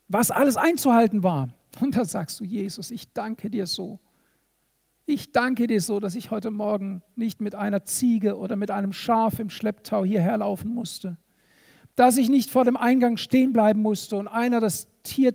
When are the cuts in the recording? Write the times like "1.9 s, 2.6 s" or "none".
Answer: none